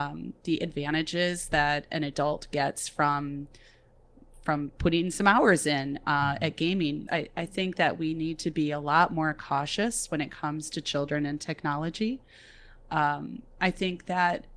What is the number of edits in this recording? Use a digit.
1